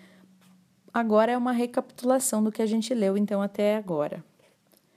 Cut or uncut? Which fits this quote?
uncut